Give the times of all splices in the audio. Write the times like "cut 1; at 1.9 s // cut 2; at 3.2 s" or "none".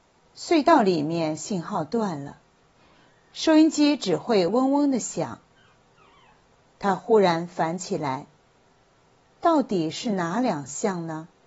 none